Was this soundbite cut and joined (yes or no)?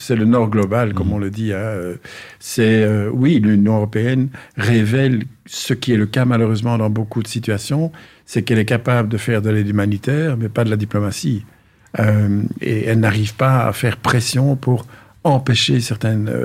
no